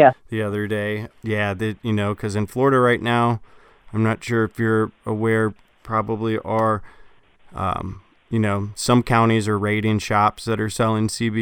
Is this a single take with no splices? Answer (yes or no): no